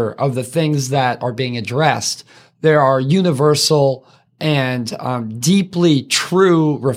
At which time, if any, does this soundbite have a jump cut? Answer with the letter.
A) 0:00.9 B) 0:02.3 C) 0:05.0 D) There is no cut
D